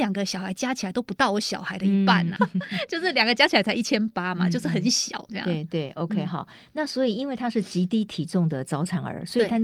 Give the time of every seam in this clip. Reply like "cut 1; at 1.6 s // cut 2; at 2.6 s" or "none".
cut 1; at 2.4 s